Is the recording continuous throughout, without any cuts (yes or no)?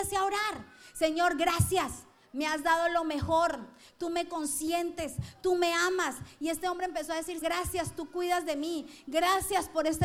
no